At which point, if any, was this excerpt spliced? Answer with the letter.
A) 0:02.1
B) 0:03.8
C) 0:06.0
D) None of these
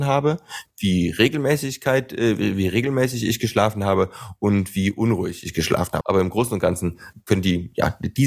C